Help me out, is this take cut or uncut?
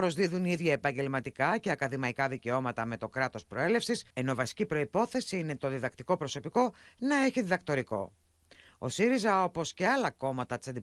cut